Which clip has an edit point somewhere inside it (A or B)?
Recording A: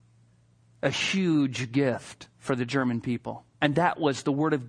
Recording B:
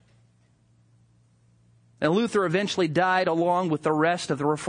A